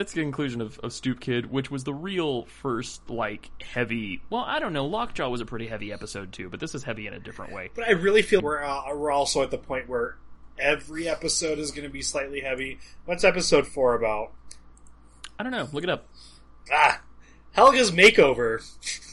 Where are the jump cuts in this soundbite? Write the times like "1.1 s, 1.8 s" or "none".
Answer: 8.4 s, 16.7 s